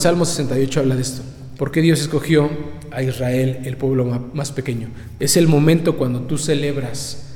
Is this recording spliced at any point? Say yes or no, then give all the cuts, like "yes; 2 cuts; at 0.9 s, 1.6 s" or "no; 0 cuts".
yes; 2 cuts; at 1.6 s, 5.2 s